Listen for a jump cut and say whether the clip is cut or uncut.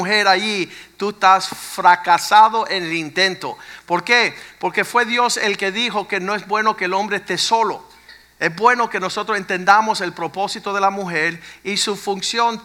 uncut